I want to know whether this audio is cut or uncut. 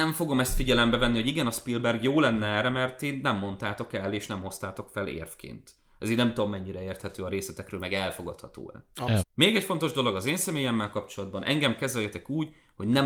cut